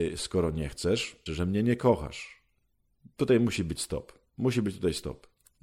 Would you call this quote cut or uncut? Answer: cut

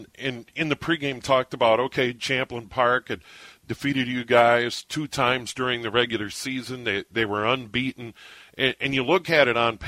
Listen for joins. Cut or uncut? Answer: uncut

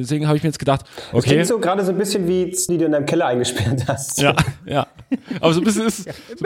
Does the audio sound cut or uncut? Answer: cut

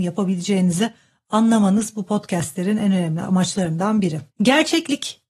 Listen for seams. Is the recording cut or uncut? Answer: cut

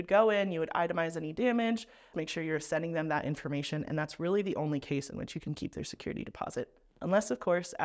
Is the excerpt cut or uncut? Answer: cut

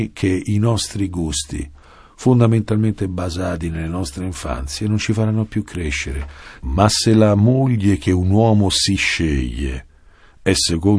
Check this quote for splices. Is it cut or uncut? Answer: uncut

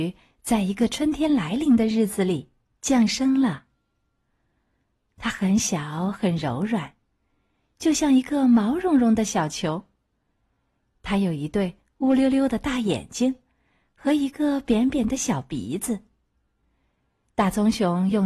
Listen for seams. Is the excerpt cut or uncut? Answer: uncut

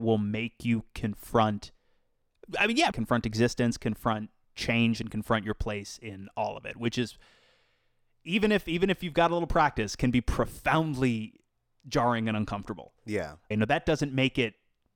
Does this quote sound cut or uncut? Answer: cut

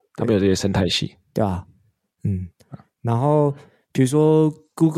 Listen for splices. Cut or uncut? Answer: uncut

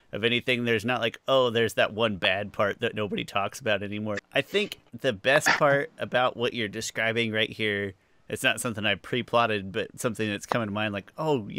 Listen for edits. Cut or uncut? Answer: cut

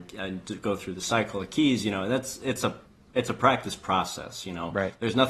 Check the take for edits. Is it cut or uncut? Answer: uncut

